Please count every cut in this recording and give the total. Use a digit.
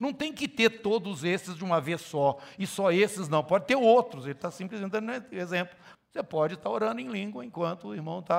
1